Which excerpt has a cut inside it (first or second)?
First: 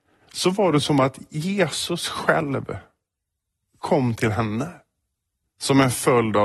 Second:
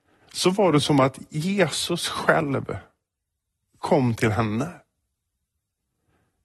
first